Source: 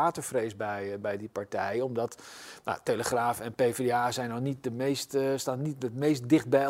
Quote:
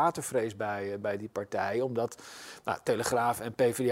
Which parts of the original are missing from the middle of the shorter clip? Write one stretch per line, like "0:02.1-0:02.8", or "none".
none